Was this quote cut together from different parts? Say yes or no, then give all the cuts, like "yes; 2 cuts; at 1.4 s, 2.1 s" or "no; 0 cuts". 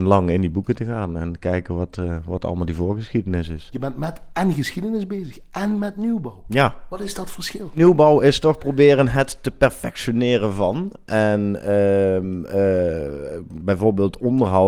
no; 0 cuts